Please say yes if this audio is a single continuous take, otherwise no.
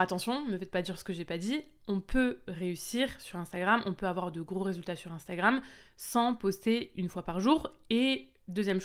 yes